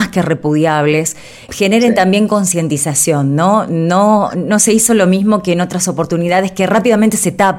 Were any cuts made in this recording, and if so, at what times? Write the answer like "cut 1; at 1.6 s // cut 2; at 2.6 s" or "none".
cut 1; at 1.5 s